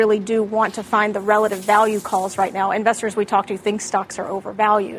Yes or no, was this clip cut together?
no